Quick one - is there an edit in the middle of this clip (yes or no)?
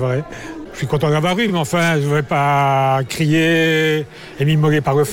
no